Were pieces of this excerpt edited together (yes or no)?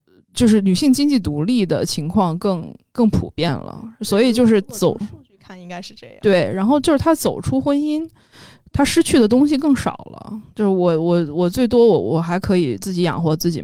no